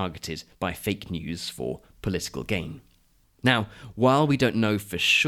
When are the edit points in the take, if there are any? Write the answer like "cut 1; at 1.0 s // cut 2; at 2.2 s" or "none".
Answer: cut 1; at 3.2 s